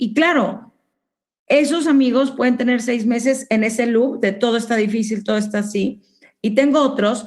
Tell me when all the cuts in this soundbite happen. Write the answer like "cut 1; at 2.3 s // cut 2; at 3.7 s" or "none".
none